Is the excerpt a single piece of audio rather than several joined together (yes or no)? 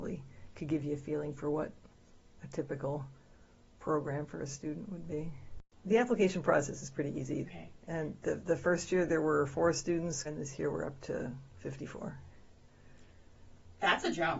no